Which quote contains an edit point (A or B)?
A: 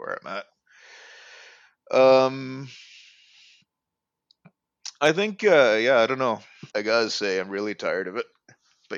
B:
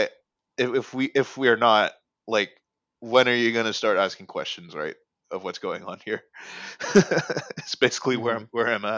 A